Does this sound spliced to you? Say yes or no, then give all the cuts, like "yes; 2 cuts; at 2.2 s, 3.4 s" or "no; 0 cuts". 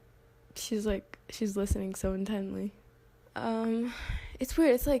yes; 1 cut; at 3.2 s